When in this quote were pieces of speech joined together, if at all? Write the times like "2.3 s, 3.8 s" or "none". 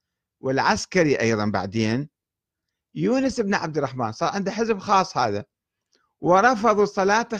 none